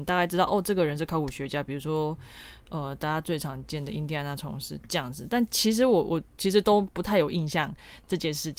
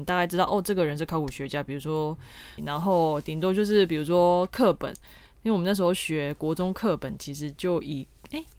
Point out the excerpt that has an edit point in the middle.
second; 1 cut; at 2.6 s

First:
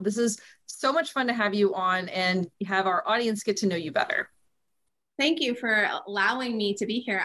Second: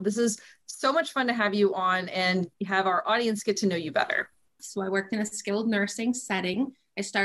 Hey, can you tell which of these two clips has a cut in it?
second; 1 cut; at 4.6 s

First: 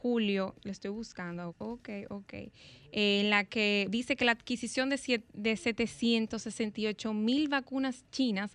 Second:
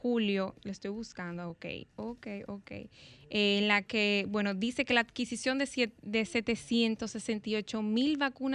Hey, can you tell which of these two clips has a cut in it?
first; 2 cuts; at 1.5 s, 3.9 s

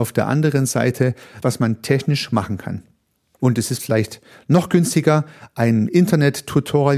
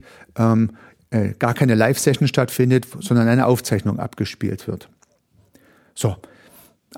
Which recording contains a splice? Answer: first; 2 cuts; at 1.4 s, 3.4 s

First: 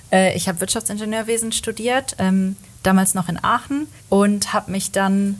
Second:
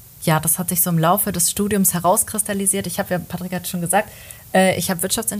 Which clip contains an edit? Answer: first; 1 cut; at 4.0 s

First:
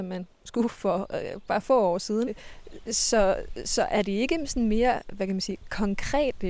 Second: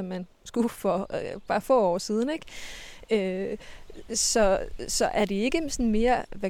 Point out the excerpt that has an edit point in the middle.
first; 1 cut; at 2.3 s

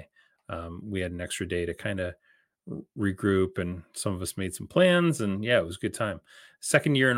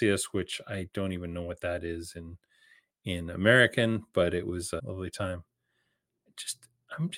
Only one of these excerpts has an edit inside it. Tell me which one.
second; 1 cut; at 4.8 s

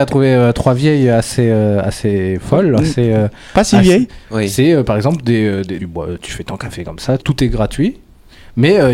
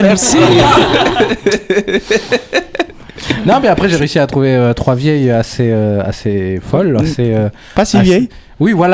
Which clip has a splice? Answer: first; 3 cuts; at 4.2 s, 5.8 s, 7.2 s

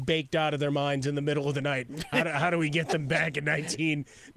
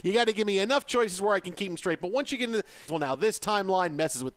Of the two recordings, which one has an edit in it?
second; 1 cut; at 2.9 s

